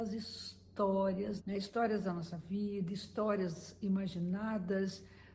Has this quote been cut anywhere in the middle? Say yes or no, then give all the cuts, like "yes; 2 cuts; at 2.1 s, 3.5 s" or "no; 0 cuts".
yes; 1 cut; at 1.4 s